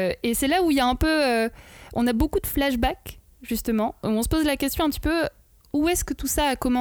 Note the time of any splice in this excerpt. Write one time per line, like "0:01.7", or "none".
none

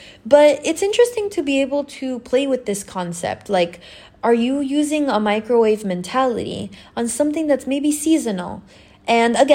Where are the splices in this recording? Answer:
none

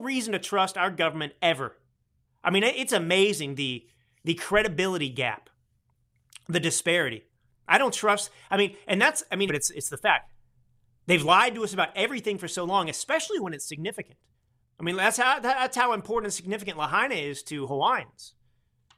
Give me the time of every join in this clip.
0:09.5
0:14.6

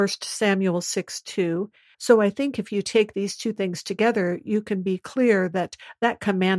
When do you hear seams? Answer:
0:01.9

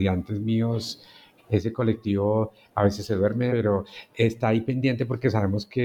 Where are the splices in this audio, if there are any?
0:01.4
0:03.5

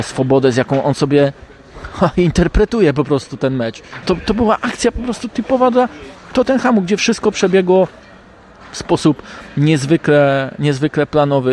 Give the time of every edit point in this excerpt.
0:04.0

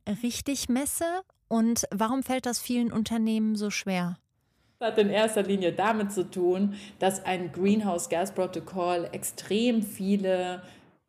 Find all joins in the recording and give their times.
none

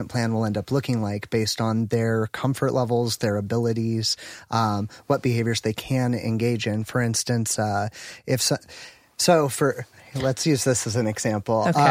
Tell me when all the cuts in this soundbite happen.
none

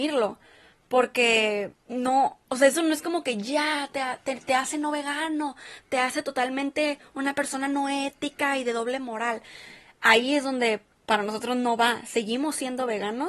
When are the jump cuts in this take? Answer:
none

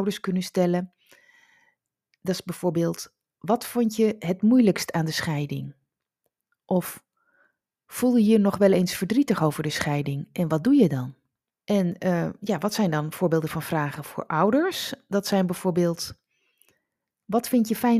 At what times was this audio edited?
0:11.5

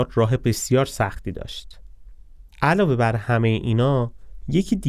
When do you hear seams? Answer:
0:02.5

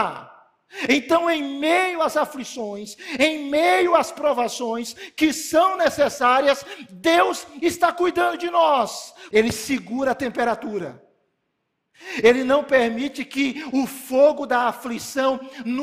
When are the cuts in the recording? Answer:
0:09.3

